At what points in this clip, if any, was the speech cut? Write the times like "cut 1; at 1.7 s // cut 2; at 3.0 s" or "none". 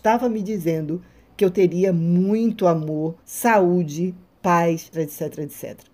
cut 1; at 3.2 s // cut 2; at 4.9 s